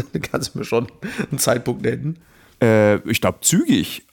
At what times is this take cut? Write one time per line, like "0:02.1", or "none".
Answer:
none